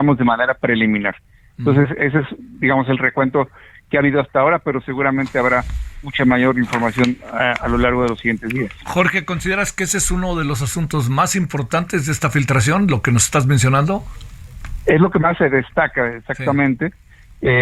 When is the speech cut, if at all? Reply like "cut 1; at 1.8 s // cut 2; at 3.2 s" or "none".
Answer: none

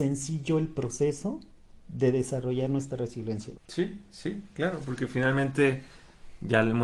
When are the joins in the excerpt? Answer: cut 1; at 3.5 s

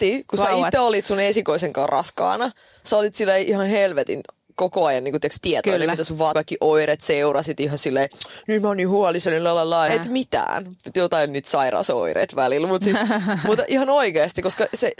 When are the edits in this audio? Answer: cut 1; at 6.3 s // cut 2; at 9.9 s

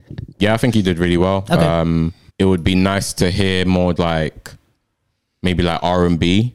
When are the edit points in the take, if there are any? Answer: cut 1; at 2.3 s // cut 2; at 4.0 s

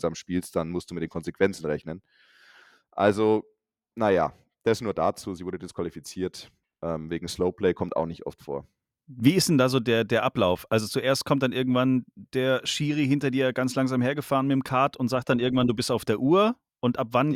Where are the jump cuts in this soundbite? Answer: none

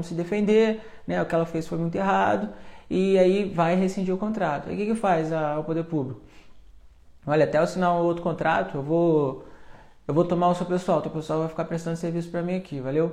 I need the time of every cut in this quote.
none

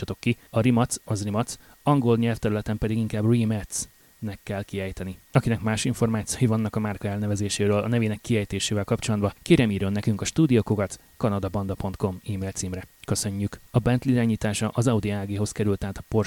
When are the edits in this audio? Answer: cut 1; at 1.0 s // cut 2; at 13.7 s

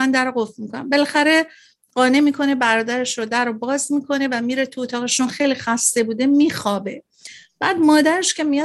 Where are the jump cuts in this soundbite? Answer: none

